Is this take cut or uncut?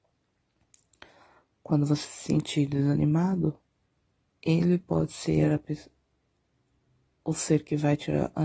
uncut